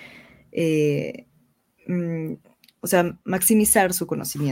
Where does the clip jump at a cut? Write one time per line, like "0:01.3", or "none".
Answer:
0:02.8